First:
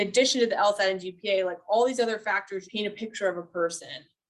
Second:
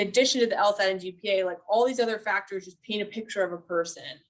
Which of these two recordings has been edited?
first; 1 cut; at 2.6 s

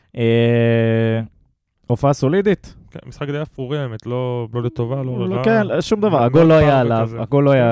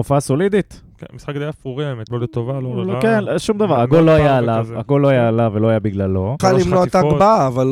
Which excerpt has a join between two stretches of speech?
second; 2 cuts; at 2.1 s, 6.4 s

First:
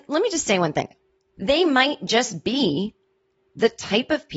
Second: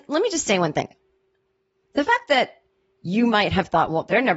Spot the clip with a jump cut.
first; 1 cut; at 1.2 s

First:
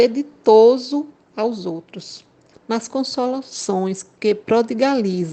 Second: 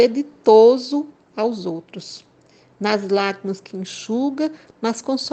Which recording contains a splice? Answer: first; 1 cut; at 2.5 s

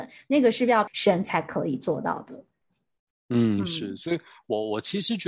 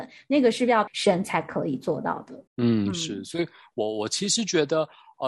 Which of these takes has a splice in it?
second; 1 cut; at 2.5 s

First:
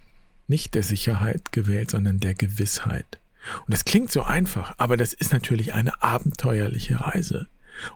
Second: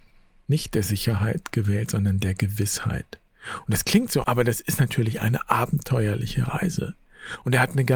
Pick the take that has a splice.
second; 1 cut; at 4.2 s

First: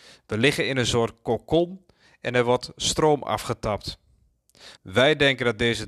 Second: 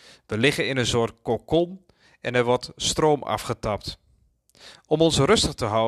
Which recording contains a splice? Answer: first; 1 cut; at 4.8 s

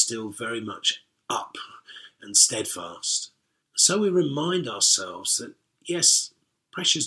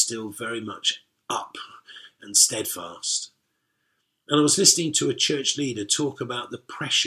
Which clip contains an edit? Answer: first; 1 cut; at 3.6 s

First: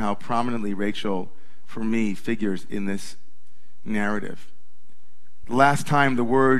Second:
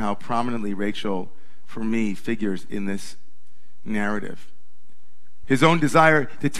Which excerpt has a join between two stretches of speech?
second; 1 cut; at 5.4 s

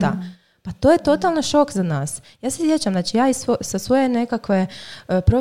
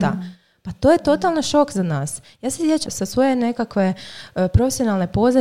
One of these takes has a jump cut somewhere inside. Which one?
second; 1 cut; at 2.9 s

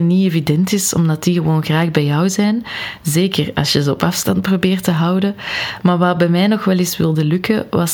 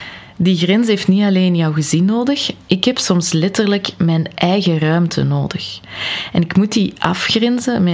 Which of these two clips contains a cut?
second; 1 cut; at 2.6 s

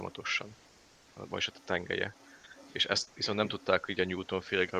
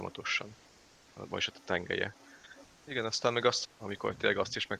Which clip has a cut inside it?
second; 2 cuts; at 2.6 s, 3.6 s

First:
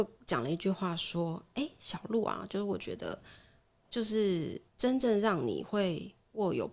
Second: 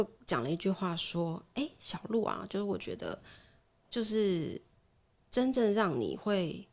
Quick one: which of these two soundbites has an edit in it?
first; 1 cut; at 4.7 s

